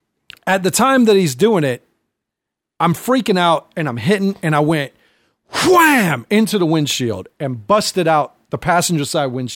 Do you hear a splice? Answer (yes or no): no